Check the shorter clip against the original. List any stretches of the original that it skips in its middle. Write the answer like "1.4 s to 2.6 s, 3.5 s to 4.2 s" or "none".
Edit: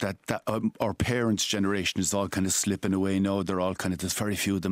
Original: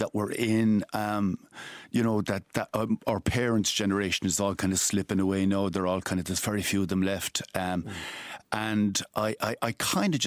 none